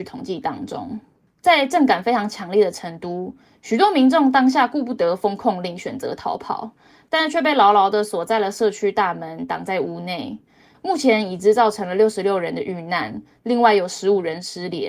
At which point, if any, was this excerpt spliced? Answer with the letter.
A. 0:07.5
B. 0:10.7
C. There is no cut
B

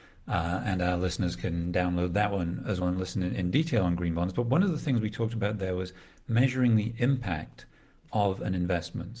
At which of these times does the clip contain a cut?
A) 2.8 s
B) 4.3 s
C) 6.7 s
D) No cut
A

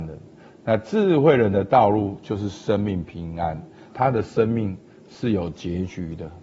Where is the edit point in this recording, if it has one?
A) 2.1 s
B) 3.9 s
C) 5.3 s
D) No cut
B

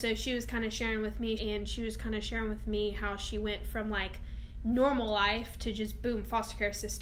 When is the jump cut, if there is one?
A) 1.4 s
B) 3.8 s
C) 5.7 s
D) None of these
A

